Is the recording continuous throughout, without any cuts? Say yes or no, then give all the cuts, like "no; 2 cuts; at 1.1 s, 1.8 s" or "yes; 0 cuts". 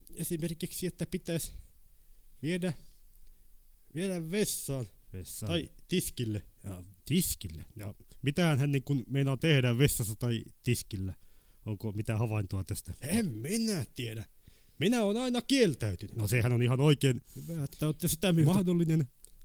yes; 0 cuts